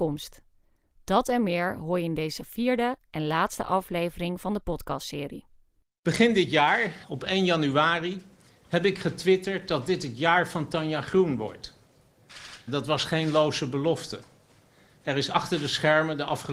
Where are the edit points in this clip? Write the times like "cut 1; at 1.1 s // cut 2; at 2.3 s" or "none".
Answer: cut 1; at 7.0 s // cut 2; at 12.7 s